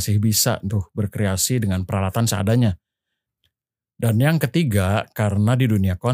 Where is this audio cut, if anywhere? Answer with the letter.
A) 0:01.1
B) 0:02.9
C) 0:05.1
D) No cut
D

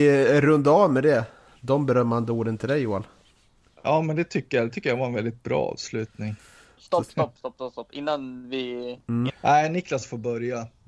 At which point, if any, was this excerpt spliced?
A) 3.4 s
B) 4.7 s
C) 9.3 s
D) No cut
C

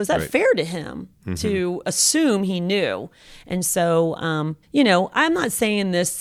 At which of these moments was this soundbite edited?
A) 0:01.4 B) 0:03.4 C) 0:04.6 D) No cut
C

